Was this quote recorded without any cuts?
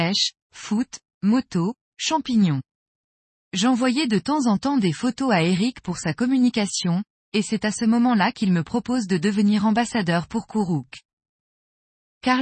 yes; 0 cuts

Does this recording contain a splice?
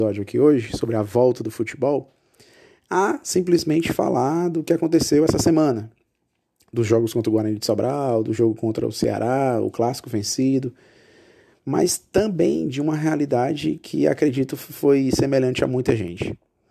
no; 0 cuts

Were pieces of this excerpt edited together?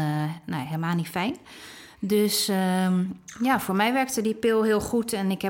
no; 0 cuts

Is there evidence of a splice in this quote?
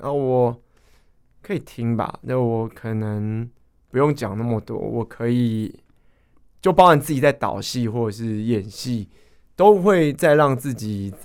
no; 0 cuts

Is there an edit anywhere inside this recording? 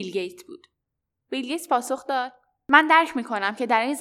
yes; 1 cut; at 1.1 s

